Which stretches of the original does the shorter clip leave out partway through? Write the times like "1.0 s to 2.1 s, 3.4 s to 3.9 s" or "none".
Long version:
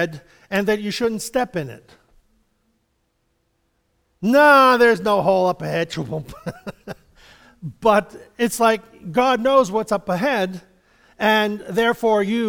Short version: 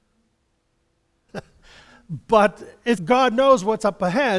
3.8 s to 6.8 s, 8.5 s to 9.0 s